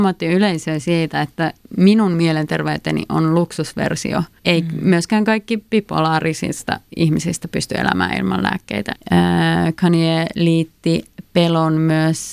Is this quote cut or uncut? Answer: cut